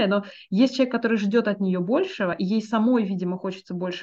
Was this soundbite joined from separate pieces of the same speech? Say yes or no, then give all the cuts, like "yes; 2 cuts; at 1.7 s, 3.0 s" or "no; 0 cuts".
no; 0 cuts